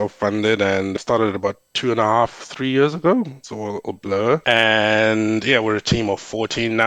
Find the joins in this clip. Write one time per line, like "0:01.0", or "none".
none